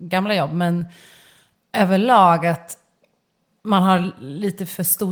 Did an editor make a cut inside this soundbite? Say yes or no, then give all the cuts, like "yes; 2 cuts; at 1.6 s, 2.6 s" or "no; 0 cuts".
no; 0 cuts